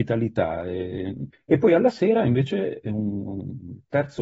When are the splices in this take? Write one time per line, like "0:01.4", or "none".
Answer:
0:01.3